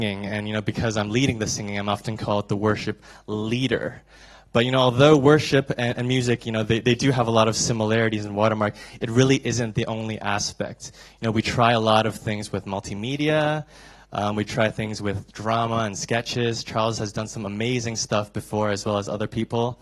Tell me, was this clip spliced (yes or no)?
no